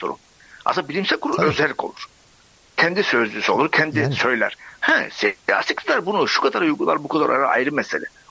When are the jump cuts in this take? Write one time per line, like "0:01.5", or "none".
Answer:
none